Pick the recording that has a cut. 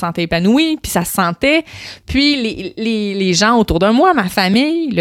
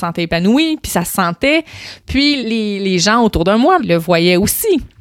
second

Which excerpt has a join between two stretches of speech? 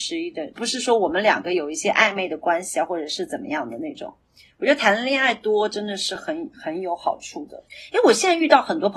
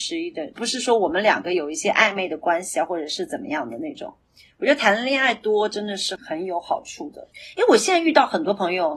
second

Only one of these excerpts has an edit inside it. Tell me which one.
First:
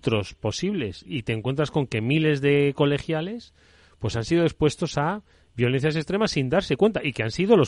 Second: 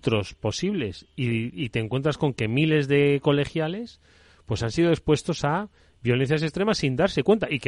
first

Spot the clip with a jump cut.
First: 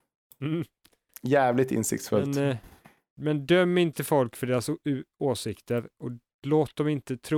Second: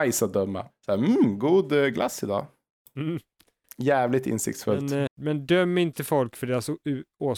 second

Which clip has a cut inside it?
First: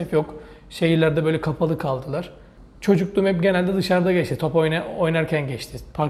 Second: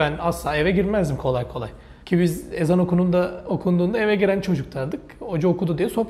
second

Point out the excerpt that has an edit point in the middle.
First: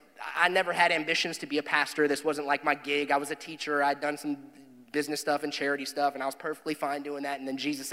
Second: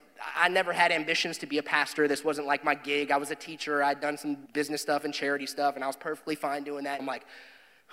second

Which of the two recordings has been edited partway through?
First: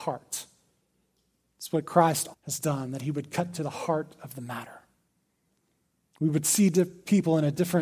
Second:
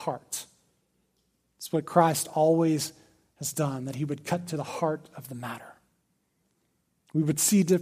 first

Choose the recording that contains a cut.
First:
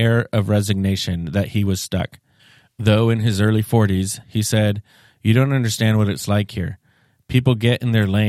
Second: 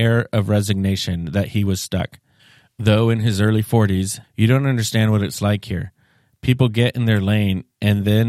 second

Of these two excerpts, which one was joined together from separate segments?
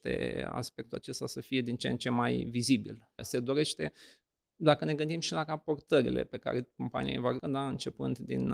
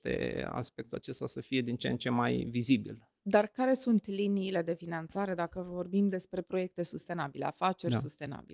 first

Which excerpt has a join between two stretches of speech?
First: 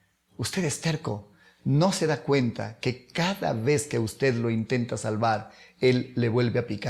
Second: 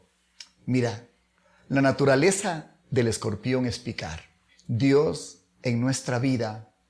second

